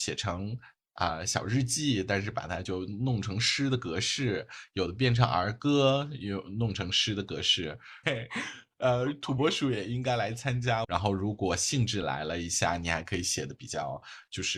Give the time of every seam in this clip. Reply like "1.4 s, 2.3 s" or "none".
8.0 s, 10.8 s